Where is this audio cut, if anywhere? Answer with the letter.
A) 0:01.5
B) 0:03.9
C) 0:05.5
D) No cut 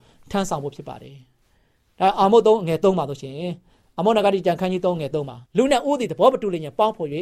C